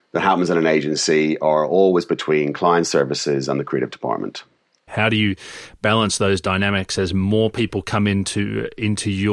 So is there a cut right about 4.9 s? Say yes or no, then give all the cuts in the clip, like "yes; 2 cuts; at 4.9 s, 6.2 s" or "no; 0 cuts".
yes; 1 cut; at 4.9 s